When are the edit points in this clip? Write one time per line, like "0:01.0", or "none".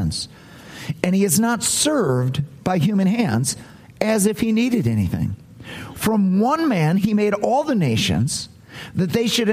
0:05.9

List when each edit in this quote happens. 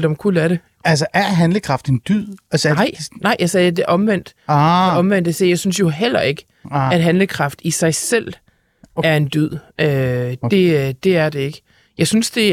none

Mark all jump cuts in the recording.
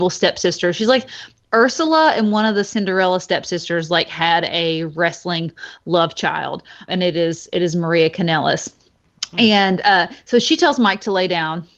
0:06.9

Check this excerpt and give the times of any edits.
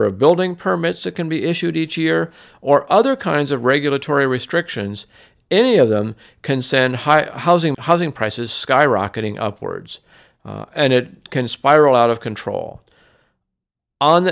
0:07.7

